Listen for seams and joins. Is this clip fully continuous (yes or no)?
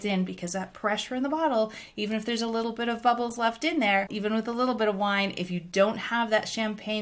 no